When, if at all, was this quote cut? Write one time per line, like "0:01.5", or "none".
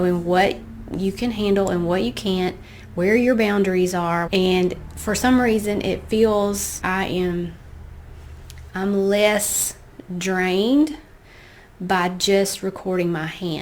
0:04.3
0:06.8
0:08.7